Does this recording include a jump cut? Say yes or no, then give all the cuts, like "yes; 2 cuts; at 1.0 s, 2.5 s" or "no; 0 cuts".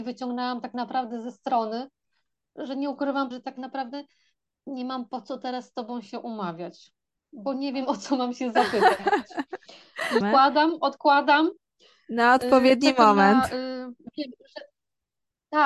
yes; 2 cuts; at 3.3 s, 10.2 s